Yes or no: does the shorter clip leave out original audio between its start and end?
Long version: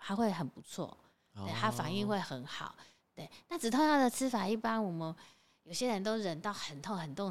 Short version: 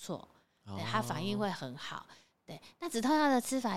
no